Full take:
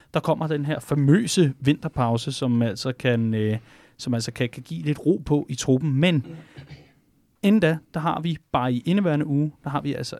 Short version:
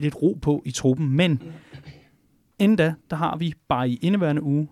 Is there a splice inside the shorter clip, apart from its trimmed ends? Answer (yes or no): no